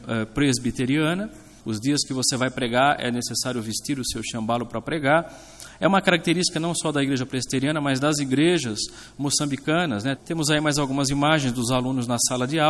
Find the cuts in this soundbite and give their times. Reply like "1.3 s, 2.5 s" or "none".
1.6 s, 10.2 s